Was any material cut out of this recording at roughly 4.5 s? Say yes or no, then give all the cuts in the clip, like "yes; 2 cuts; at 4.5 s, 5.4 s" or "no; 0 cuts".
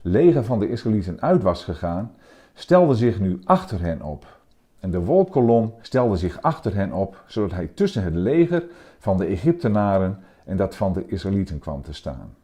no; 1 cut; at 5.8 s